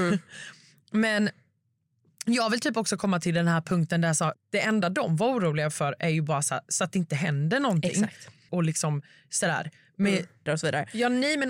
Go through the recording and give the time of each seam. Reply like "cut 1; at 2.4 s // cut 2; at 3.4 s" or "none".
cut 1; at 4.3 s // cut 2; at 8.5 s // cut 3; at 10.5 s